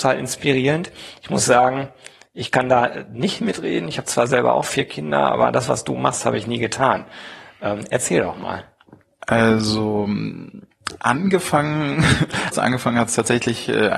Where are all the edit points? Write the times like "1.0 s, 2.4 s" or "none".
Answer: 12.5 s